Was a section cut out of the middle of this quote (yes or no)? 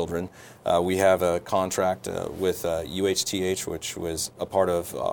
no